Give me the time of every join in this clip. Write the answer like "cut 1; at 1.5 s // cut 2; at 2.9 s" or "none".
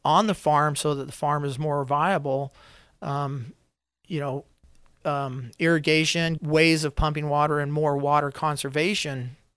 cut 1; at 5.0 s // cut 2; at 6.4 s